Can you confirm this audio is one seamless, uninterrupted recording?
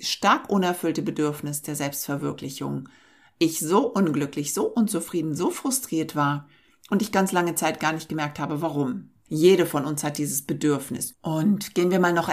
no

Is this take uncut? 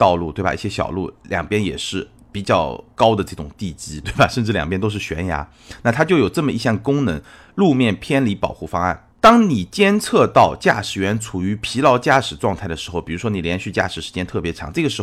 no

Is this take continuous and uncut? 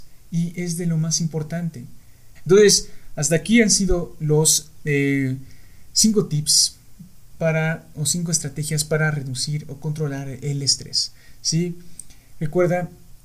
no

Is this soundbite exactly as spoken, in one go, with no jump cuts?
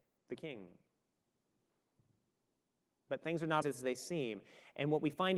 no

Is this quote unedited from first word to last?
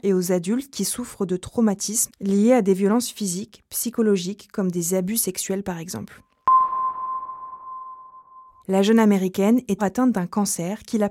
no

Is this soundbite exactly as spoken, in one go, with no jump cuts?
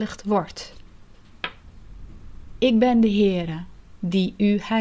yes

